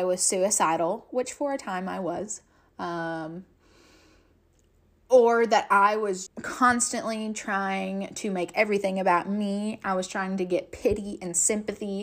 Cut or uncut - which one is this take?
cut